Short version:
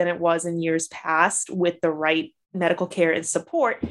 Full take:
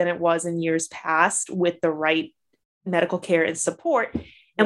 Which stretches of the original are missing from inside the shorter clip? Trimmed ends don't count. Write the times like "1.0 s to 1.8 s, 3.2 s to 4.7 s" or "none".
2.4 s to 2.7 s